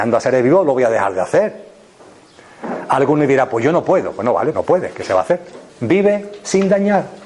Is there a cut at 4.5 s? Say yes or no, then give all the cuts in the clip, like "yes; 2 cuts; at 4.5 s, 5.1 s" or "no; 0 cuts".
yes; 2 cuts; at 4.5 s, 5.7 s